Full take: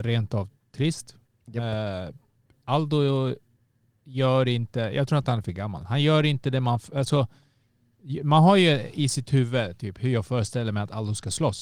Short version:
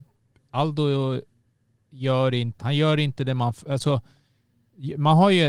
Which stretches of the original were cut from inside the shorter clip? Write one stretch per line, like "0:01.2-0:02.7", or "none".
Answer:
0:04.7-0:05.8